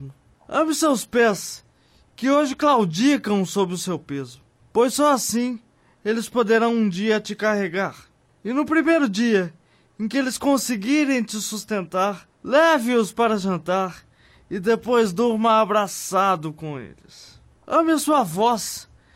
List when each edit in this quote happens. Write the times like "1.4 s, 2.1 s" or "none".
none